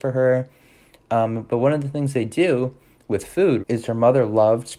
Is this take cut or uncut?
cut